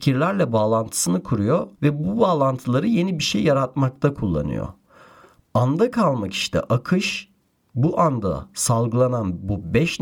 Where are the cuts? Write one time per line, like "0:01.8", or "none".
0:01.7